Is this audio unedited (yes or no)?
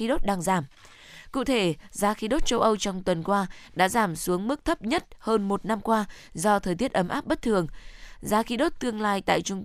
yes